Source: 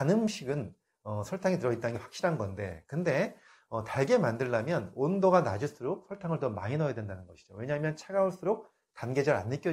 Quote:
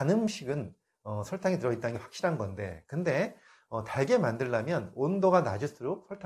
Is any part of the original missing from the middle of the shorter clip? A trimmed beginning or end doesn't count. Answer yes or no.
no